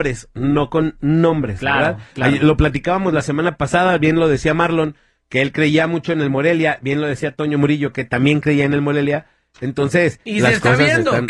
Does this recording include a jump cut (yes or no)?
no